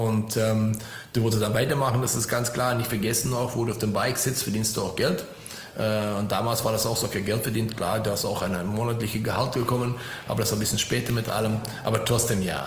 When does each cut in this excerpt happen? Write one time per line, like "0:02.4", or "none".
none